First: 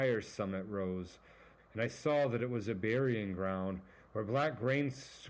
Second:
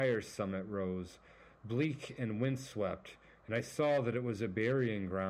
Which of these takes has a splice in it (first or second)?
first